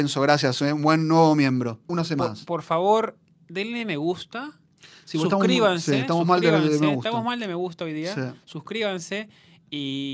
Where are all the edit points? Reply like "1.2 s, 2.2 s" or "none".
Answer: 1.9 s

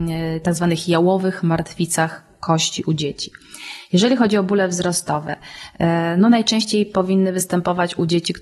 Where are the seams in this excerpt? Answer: none

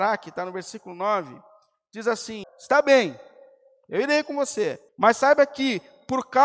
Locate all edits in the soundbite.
2.4 s, 4.9 s

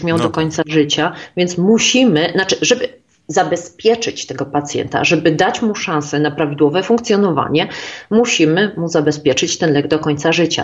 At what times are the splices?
none

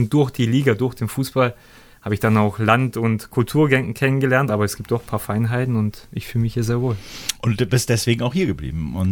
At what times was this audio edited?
4.5 s

